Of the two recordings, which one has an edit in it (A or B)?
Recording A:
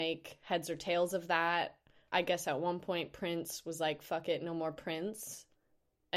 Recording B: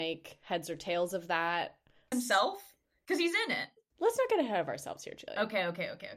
B